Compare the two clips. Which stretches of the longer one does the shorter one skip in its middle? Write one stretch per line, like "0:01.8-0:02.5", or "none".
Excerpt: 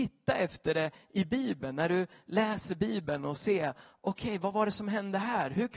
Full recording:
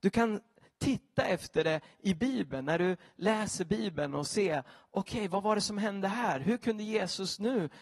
none